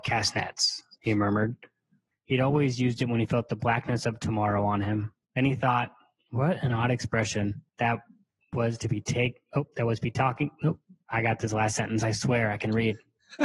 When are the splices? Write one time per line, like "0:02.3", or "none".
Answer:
0:02.1
0:05.2
0:07.7

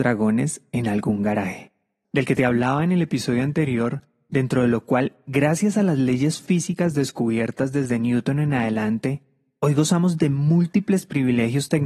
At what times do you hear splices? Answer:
0:02.0

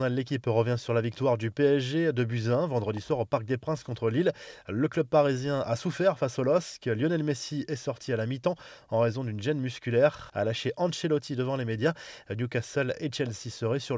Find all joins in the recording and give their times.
0:10.3

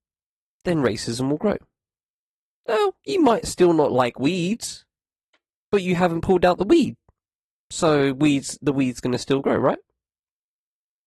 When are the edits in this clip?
none

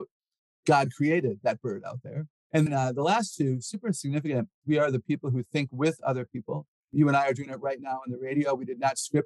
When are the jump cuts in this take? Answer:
0:02.7
0:04.6

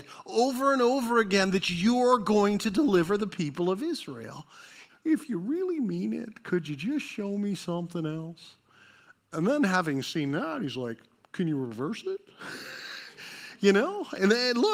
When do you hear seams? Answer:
0:04.9

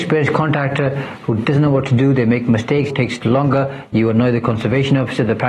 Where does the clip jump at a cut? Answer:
0:02.9

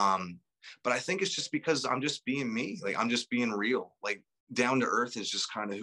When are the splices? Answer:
none

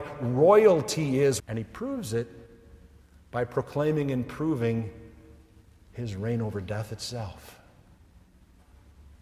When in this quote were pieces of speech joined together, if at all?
0:01.4

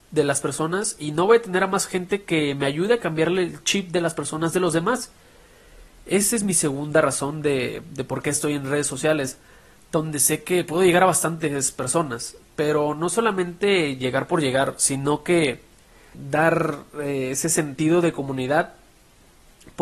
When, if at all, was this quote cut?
none

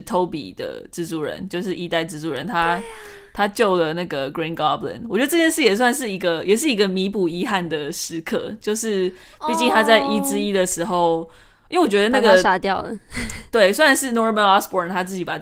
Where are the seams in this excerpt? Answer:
none

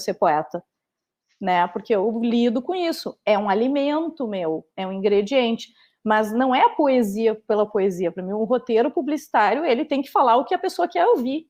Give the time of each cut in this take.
none

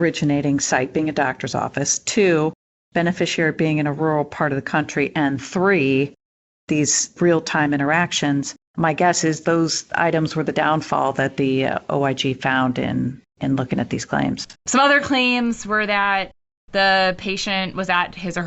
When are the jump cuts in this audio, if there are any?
0:08.6
0:14.6

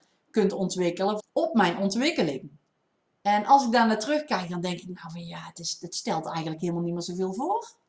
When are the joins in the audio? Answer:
0:01.2

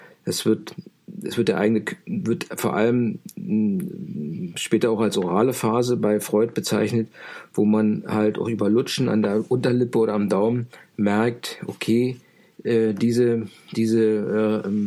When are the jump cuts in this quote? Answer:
none

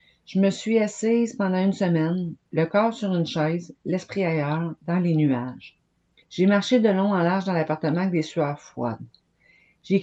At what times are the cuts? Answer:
0:06.2

